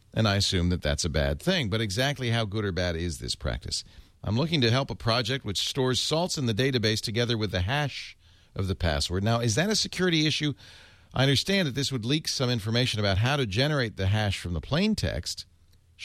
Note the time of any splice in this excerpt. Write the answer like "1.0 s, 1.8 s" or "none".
4.1 s